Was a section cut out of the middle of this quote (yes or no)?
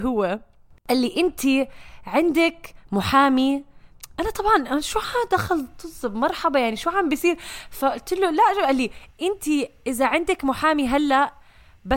no